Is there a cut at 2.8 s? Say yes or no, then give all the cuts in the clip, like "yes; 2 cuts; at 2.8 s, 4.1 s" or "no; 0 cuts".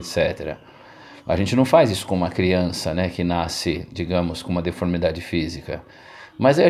no; 0 cuts